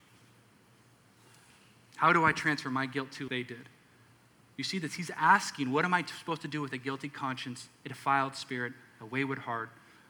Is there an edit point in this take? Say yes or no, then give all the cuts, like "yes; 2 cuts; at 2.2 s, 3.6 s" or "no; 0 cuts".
yes; 1 cut; at 3.3 s